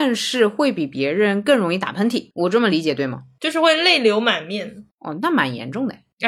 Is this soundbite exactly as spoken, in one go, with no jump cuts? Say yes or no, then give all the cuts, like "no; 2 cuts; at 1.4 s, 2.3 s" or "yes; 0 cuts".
yes; 0 cuts